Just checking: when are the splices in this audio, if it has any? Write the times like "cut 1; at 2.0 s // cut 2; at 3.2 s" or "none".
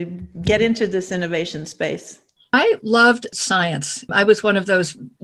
none